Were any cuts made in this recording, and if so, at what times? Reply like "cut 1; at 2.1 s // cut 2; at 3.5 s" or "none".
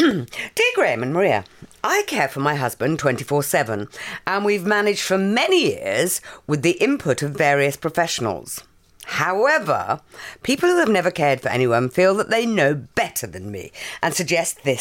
none